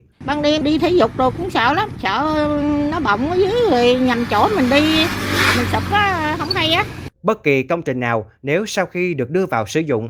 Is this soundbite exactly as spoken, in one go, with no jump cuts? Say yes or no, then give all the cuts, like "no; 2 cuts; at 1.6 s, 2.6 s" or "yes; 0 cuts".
no; 1 cut; at 7.1 s